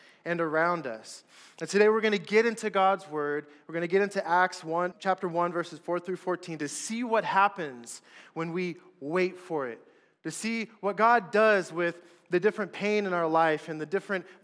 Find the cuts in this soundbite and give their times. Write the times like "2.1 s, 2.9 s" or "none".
4.9 s